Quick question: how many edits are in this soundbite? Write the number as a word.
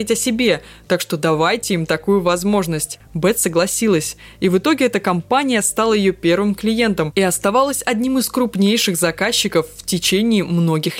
one